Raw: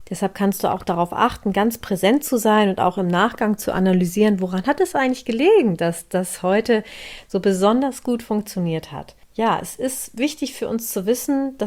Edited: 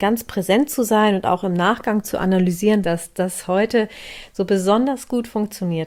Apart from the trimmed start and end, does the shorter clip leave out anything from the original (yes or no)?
yes